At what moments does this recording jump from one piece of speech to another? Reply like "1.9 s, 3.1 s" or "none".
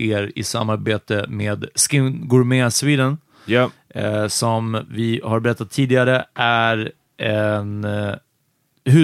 none